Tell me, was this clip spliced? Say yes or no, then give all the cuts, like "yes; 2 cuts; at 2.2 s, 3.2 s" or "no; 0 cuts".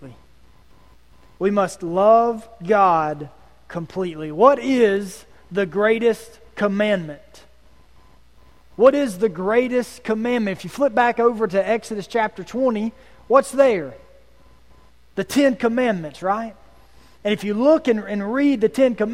no; 0 cuts